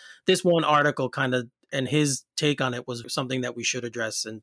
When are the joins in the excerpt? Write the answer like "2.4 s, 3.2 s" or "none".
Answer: 3.0 s